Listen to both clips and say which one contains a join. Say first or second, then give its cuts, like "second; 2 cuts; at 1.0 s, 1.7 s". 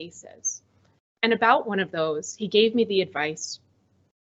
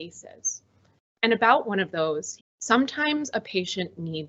second; 1 cut; at 2.4 s